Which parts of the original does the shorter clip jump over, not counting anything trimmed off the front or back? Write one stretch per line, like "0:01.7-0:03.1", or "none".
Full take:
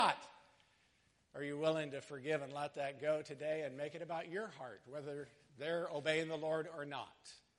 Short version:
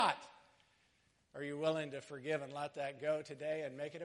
none